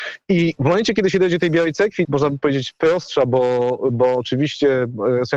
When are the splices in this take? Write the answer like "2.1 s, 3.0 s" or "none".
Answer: 2.0 s